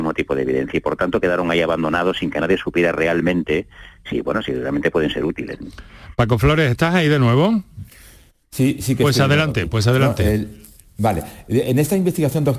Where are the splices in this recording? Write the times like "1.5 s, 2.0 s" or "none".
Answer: 4.1 s

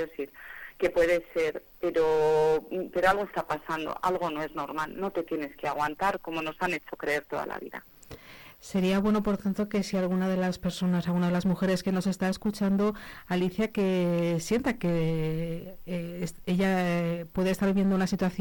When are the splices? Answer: none

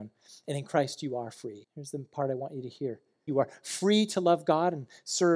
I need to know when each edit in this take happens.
1.6 s, 3.3 s

